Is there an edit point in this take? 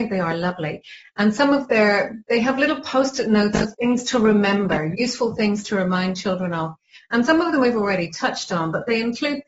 no; 0 cuts

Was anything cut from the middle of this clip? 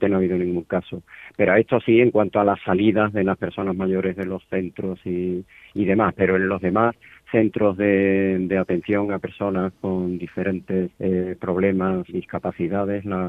yes; 2 cuts; at 10.9 s, 12.1 s

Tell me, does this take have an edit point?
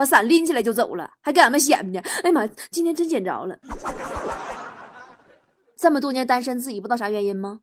yes; 1 cut; at 2.7 s

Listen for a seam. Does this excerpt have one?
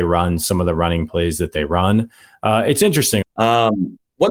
yes; 1 cut; at 3.2 s

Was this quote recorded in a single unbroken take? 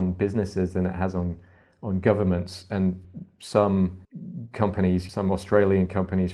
yes; 0 cuts

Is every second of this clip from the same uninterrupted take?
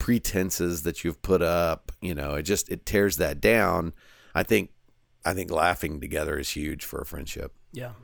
yes; 0 cuts

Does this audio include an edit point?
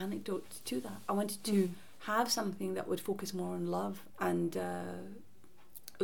yes; 1 cut; at 4.1 s

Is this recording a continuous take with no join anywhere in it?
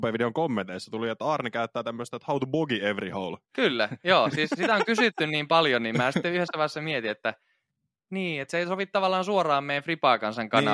no; 2 cuts; at 3.4 s, 8.4 s

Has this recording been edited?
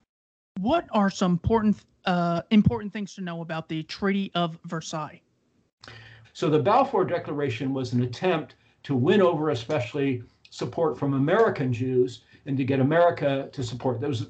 yes; 1 cut; at 6.2 s

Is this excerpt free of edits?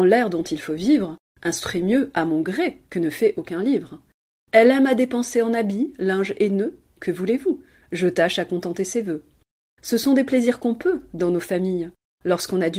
yes; 0 cuts

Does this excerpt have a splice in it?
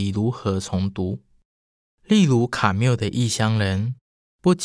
no; 0 cuts

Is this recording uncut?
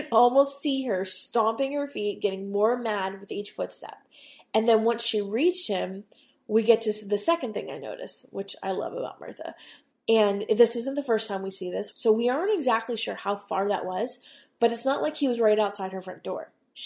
no; 2 cuts; at 9.9 s, 11.9 s

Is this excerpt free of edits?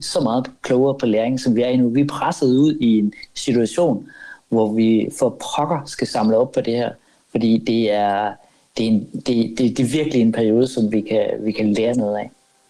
yes; 0 cuts

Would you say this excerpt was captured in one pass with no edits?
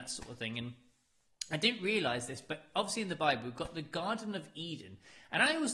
yes; 0 cuts

